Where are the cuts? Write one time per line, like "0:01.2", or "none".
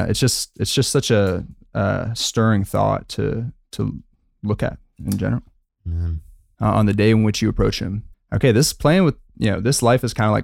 0:06.6
0:08.1

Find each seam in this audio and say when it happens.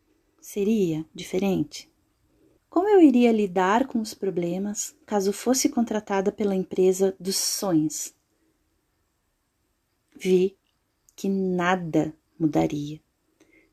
0:02.6

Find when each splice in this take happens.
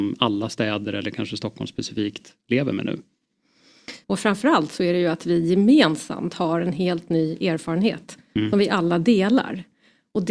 0:04.0

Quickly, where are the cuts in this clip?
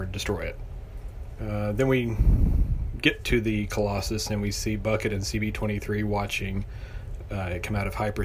0:01.4

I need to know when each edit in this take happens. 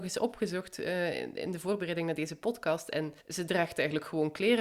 0:03.2

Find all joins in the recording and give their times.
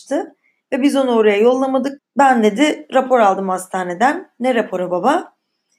0:02.0

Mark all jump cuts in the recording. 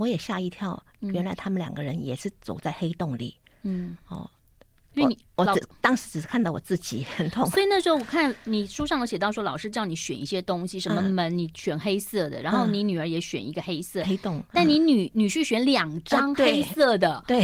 none

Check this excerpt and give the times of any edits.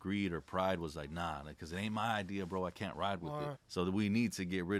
0:03.5

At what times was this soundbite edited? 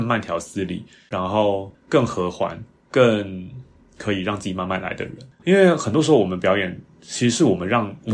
0:05.4

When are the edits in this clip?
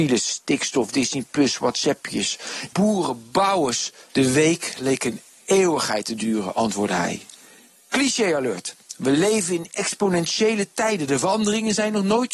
0:02.7
0:04.1

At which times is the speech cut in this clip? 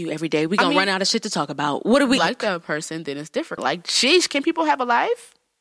0:02.2
0:03.6

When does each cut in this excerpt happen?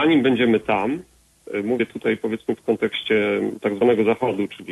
none

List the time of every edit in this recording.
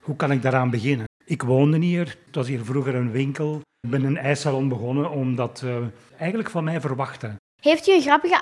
0:01.1

